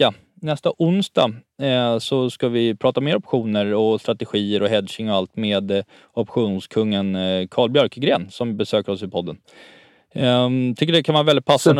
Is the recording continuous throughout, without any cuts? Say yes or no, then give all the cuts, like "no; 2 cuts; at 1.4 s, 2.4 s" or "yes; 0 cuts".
yes; 0 cuts